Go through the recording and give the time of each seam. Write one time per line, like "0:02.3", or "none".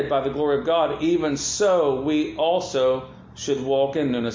none

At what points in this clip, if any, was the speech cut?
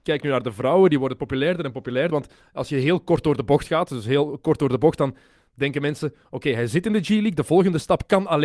0:02.1

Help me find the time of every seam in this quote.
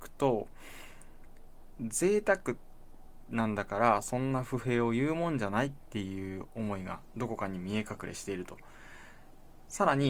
0:01.8

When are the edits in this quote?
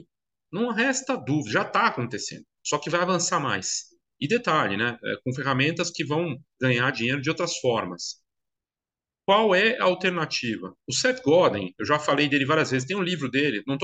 0:02.5

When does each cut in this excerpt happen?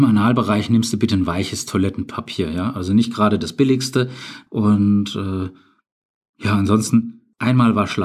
0:04.5

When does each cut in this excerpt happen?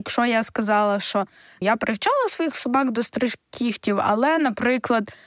0:01.6

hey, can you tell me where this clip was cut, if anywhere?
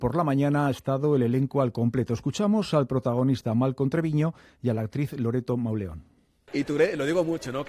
none

